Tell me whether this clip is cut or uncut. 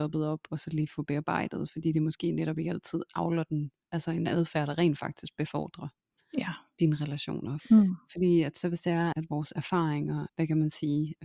cut